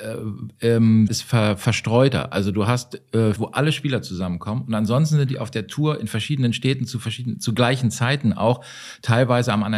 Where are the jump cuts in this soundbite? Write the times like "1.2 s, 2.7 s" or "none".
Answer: 1.1 s, 3.4 s